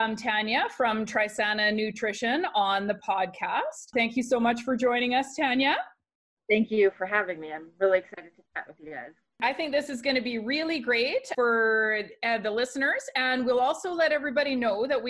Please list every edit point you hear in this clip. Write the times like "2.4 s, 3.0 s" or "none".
none